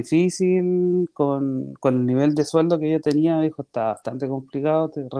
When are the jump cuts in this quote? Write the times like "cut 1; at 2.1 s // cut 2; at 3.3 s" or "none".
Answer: none